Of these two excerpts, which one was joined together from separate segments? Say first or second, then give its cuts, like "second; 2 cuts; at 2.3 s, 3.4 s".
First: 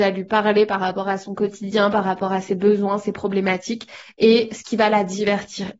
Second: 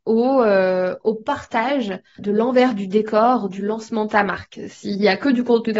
second; 1 cut; at 2.2 s